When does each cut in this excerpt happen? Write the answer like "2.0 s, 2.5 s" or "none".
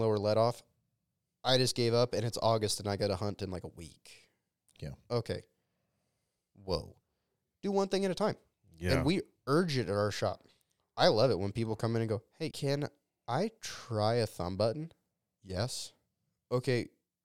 12.5 s